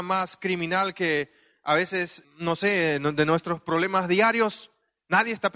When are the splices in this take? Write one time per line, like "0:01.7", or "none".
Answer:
0:02.2